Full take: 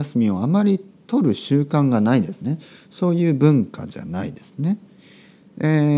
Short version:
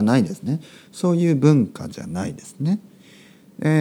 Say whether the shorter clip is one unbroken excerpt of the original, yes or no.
yes